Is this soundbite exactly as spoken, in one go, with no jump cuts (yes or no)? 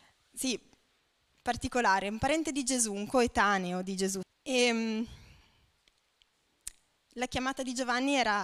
no